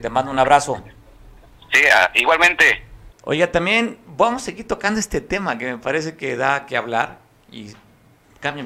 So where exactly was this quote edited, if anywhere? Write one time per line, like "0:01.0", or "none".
0:03.1